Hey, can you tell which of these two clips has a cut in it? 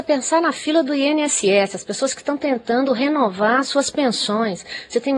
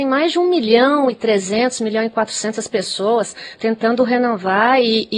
second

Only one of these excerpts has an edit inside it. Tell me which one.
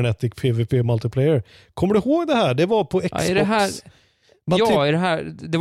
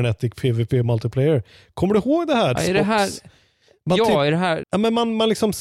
second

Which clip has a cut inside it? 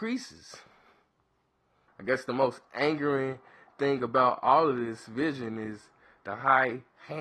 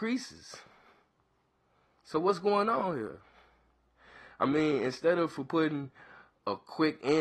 first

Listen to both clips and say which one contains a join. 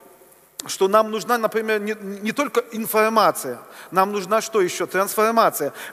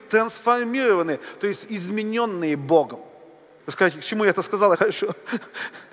second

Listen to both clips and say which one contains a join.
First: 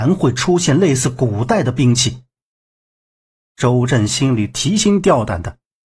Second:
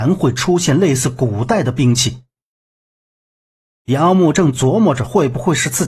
first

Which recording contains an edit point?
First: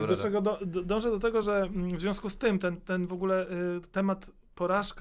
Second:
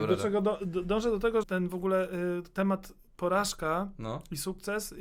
second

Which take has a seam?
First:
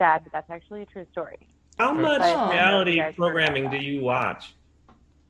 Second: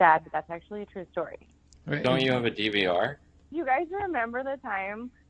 second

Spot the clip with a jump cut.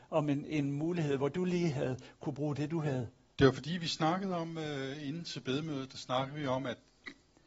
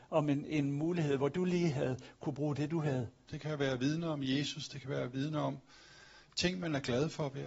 second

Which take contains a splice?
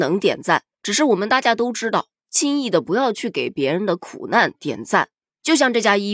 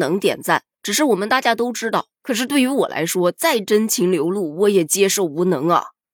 second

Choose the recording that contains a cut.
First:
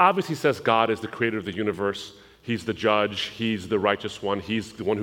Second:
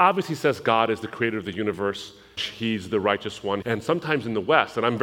second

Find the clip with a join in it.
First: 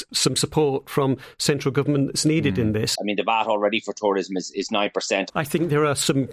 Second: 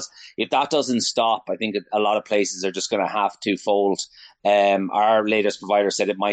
first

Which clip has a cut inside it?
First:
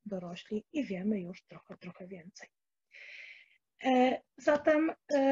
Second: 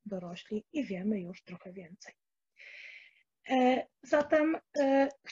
second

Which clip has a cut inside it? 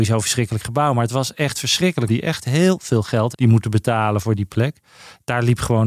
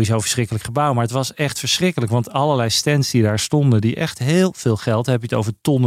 first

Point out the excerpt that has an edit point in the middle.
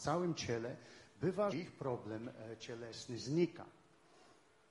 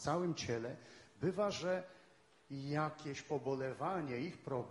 first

